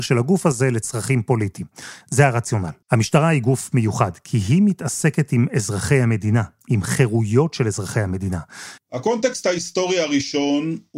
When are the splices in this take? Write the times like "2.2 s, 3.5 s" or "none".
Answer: 2.8 s, 8.8 s

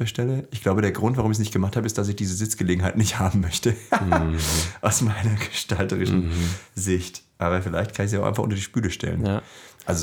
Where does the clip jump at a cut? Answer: none

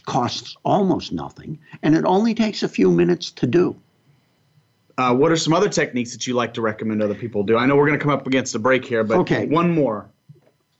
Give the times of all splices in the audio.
none

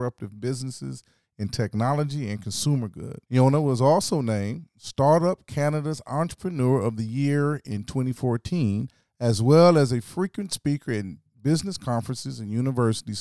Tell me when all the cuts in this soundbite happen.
3.2 s

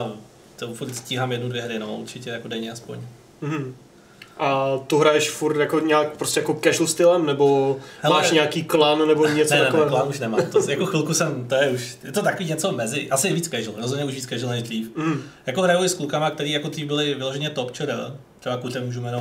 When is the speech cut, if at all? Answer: none

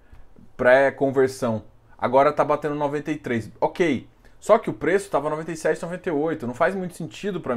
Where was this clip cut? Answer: none

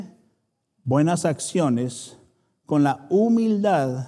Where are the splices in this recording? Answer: none

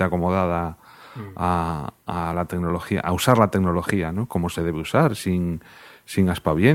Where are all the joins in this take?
none

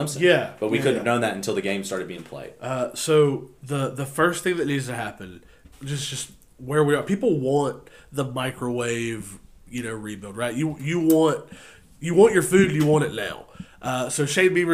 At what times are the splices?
5.7 s

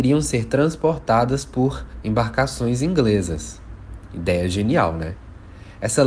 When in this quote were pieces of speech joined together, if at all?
none

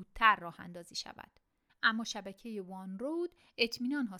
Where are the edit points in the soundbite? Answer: 1.7 s

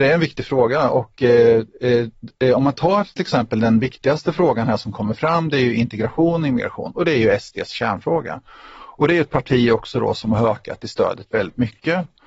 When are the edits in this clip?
none

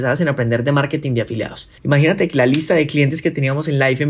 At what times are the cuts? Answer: 1.8 s

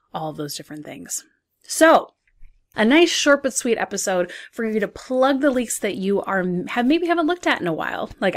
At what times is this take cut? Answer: 2.7 s

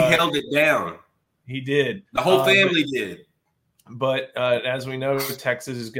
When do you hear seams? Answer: 2.0 s

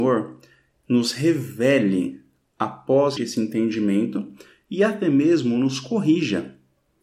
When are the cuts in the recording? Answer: 3.2 s

